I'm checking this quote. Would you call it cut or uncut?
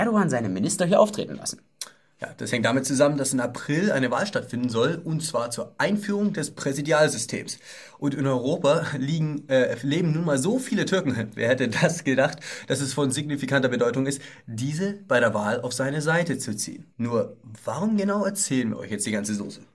cut